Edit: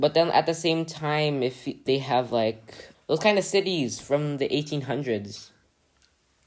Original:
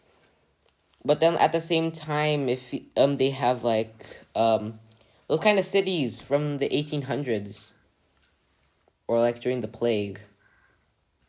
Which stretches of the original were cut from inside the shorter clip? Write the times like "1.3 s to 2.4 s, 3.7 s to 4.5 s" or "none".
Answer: 2.9 s to 3.2 s, 4.3 s to 5.2 s